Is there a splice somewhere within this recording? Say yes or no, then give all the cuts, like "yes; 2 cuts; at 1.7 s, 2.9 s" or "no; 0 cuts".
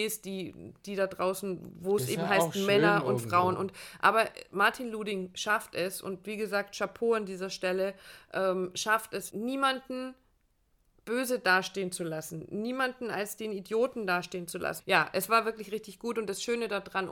yes; 2 cuts; at 9.3 s, 14.8 s